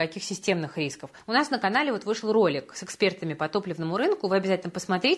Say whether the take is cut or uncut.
cut